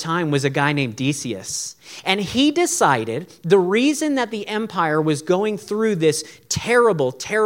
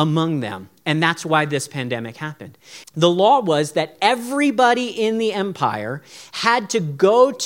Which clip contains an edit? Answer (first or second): second